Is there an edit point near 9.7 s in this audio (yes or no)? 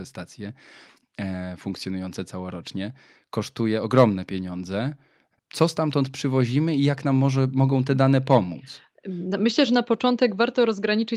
no